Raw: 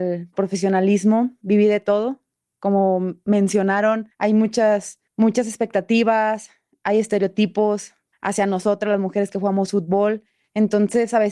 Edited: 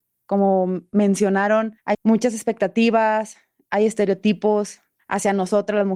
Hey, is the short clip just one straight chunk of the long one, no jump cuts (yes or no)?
no